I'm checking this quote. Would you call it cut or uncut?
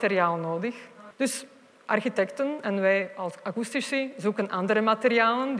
cut